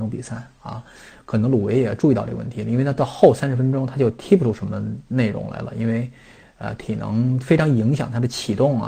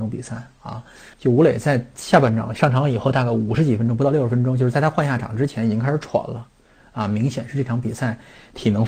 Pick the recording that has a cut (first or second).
second